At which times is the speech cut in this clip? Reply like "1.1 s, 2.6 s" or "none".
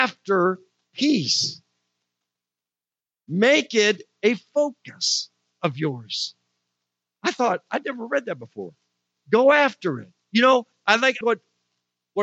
9.2 s, 11.2 s